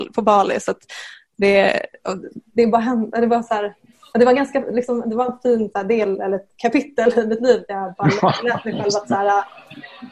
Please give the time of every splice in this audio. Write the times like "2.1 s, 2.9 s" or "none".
none